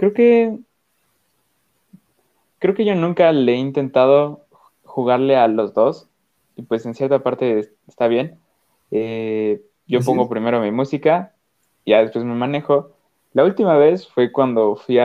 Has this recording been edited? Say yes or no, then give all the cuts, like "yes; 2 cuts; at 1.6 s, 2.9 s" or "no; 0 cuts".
no; 0 cuts